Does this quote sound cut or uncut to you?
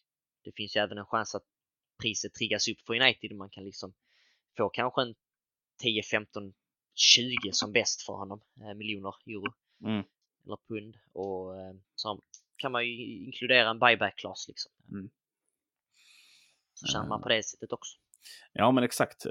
cut